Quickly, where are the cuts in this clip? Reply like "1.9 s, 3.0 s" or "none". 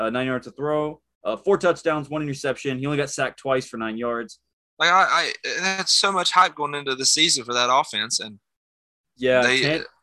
4.6 s